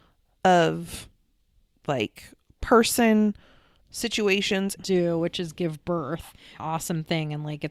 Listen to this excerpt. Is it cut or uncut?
cut